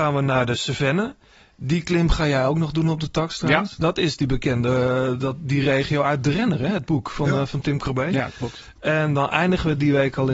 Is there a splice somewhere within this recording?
no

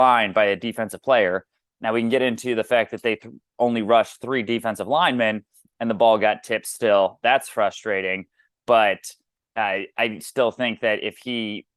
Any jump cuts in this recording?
no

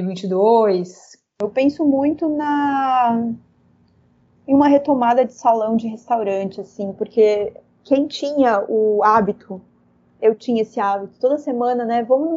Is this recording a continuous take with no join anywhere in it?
yes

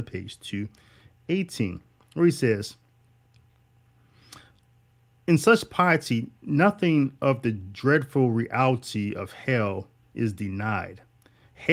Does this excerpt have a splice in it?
no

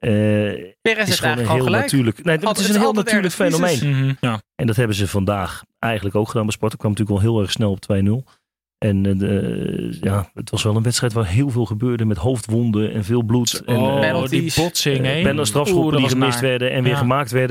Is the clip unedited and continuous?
no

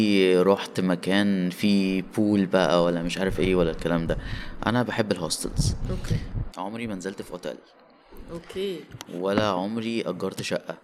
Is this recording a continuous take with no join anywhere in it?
no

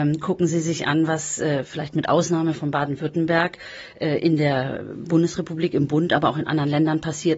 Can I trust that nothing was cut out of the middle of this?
yes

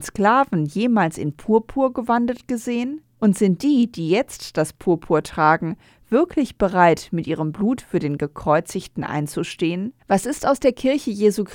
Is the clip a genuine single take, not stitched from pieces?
yes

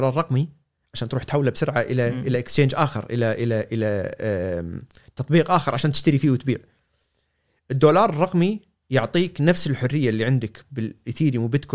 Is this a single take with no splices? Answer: yes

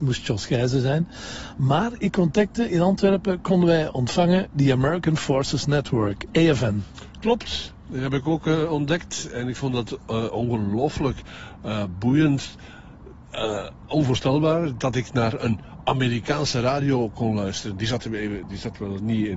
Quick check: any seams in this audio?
no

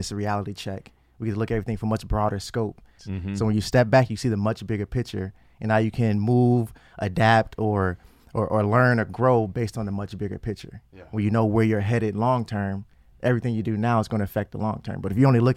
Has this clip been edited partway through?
yes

